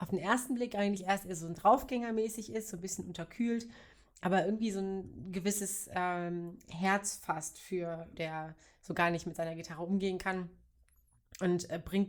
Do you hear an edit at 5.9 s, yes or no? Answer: no